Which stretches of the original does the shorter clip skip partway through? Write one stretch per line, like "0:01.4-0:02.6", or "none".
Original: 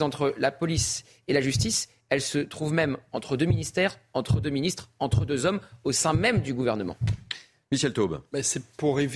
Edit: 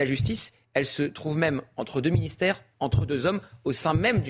0:04.1-0:04.9